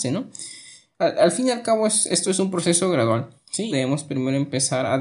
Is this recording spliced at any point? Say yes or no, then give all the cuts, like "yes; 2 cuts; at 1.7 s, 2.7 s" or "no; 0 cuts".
yes; 1 cut; at 3.7 s